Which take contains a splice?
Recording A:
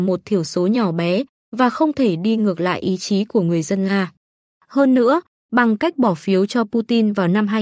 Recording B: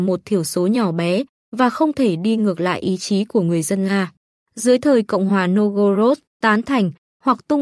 B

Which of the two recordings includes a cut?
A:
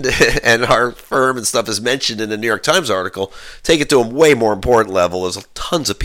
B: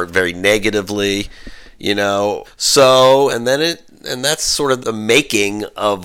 B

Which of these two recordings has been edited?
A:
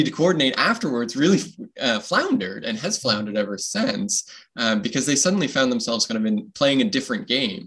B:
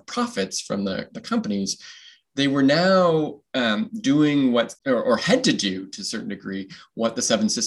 B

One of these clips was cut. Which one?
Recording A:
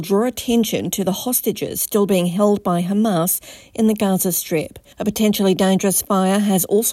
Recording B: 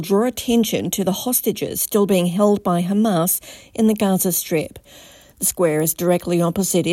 A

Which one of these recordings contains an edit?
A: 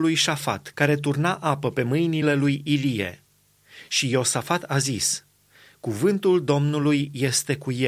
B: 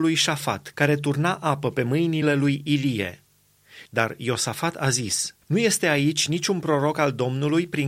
B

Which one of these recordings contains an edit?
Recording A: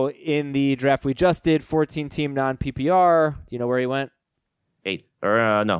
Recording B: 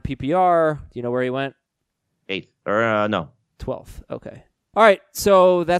B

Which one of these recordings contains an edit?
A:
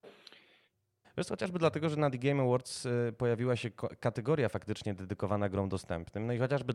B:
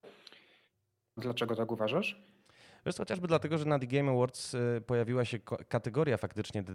A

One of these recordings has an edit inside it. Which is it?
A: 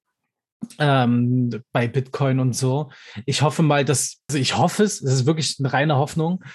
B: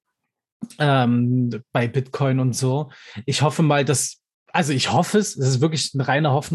A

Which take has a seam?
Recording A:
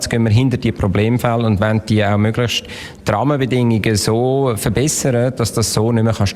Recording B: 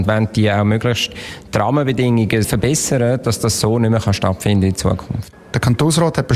B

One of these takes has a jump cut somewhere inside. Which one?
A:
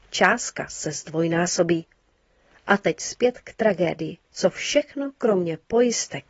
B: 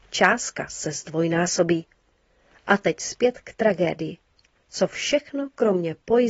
A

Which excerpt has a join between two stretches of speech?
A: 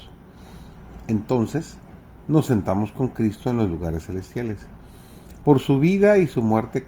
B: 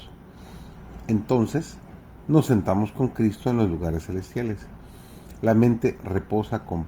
A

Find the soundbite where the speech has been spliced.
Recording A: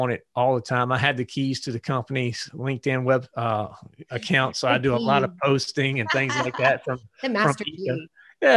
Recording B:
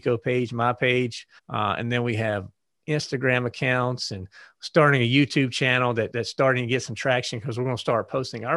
B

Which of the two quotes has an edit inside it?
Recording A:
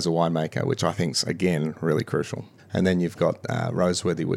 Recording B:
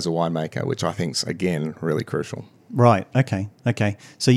A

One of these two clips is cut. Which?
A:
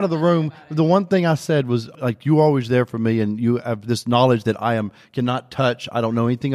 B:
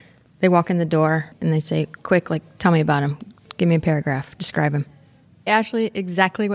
B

